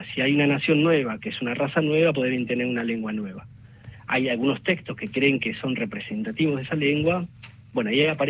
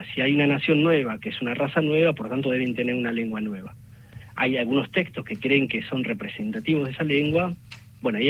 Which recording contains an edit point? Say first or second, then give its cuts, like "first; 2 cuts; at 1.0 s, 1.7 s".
first; 1 cut; at 2.1 s